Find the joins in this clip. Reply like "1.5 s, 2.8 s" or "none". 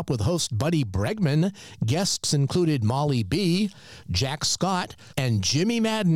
4.0 s, 5.1 s